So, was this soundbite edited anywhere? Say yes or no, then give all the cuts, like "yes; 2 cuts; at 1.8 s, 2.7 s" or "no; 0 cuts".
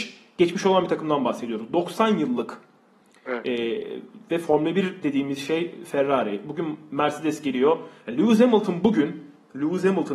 no; 0 cuts